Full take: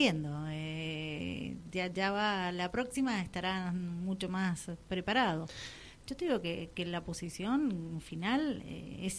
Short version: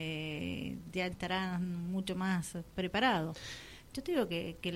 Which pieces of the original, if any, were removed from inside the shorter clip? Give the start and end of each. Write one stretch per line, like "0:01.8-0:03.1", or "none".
0:01.9-0:03.2

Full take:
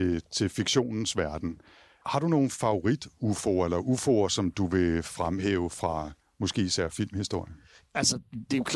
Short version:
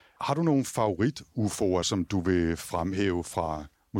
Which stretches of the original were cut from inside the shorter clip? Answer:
0:03.7-0:04.3

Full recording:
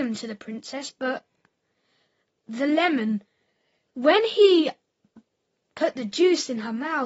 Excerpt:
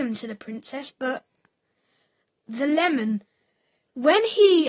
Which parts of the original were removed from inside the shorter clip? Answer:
none

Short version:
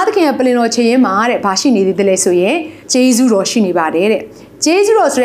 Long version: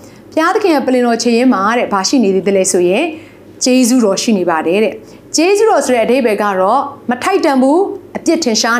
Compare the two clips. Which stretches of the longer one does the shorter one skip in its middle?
0:03.3-0:03.5

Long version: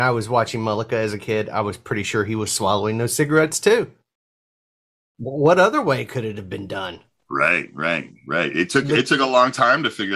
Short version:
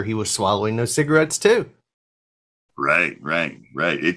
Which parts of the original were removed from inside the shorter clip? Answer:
0:04.9-0:07.2

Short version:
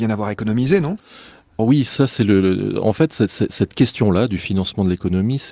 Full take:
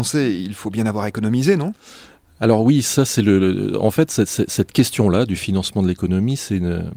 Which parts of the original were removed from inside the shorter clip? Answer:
0:02.4-0:02.6

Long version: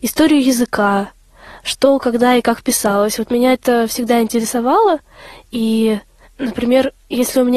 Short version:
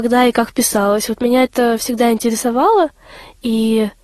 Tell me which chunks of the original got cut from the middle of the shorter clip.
none

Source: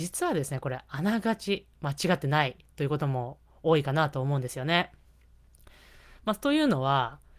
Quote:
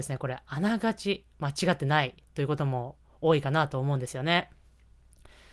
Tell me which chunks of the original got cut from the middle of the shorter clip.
none

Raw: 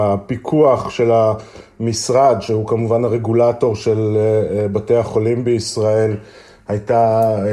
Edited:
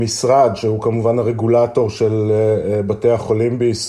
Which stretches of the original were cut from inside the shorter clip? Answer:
none

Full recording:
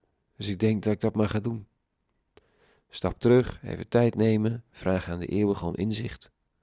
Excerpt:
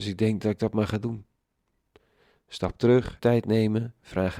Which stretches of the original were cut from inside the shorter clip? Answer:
0:03.6-0:03.9

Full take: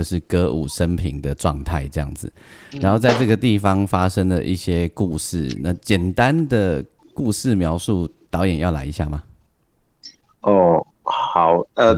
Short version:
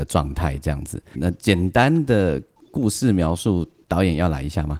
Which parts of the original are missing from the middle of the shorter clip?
0:02.4-0:05.6

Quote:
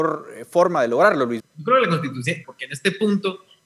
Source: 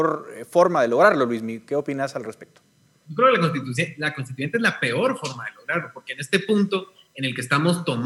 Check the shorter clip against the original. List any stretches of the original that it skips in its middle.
0:01.4-0:02.9
0:04.0-0:05.9

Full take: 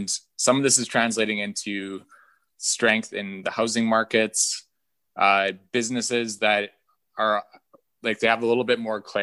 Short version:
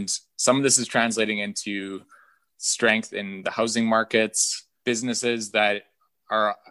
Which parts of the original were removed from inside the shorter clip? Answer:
0:04.8-0:05.7

